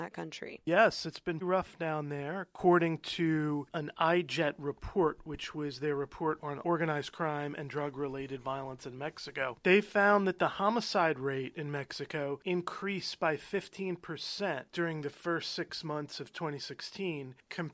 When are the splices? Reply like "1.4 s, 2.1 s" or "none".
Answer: 1.4 s